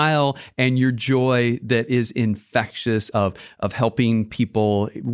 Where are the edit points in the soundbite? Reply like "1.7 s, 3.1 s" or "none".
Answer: none